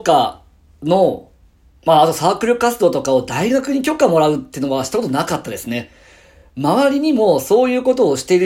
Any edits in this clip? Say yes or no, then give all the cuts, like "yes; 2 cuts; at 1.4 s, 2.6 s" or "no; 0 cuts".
no; 0 cuts